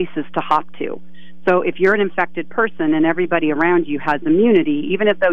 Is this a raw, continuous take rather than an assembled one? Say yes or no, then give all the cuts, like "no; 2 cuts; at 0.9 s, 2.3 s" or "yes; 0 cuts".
yes; 0 cuts